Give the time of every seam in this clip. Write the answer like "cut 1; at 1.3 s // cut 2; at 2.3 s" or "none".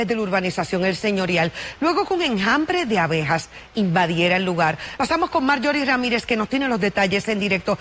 cut 1; at 5.0 s